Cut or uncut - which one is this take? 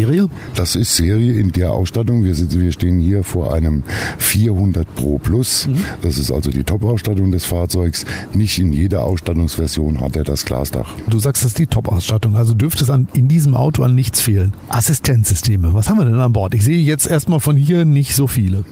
uncut